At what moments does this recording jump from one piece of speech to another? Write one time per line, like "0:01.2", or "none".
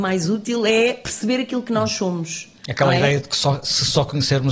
none